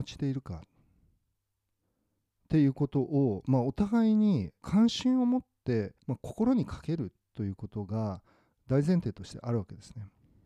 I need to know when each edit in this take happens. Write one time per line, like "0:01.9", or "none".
0:04.6
0:06.0